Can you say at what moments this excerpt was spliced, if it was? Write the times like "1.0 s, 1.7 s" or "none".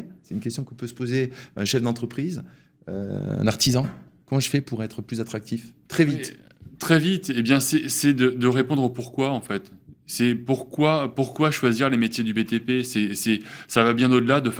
none